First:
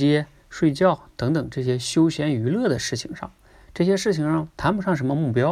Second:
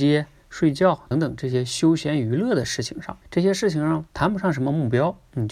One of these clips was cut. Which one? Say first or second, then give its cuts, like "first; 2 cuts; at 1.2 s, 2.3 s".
second; 2 cuts; at 1.1 s, 3.2 s